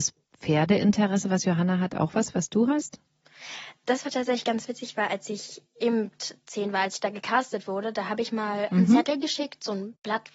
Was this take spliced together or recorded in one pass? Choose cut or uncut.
uncut